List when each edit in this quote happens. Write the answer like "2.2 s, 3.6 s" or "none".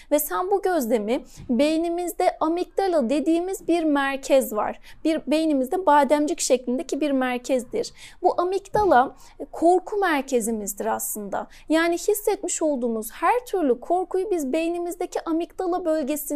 none